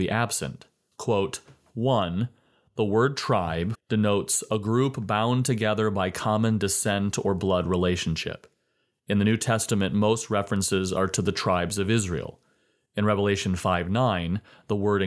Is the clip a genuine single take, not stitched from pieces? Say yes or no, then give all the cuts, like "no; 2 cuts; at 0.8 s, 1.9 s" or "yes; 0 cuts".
no; 2 cuts; at 0.9 s, 3.7 s